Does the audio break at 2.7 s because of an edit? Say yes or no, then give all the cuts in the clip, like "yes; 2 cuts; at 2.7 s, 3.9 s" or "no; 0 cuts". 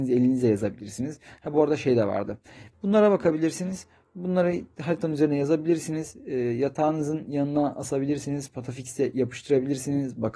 yes; 1 cut; at 2.7 s